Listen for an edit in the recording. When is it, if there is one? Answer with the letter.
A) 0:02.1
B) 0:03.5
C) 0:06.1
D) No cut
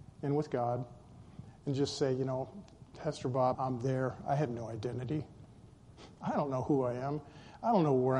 B